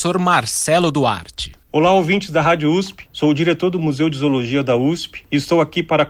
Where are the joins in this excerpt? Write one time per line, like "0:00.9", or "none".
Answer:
0:01.6
0:03.1